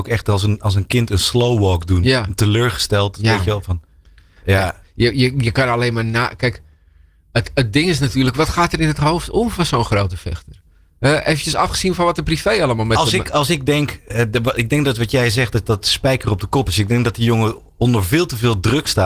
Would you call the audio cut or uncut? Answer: uncut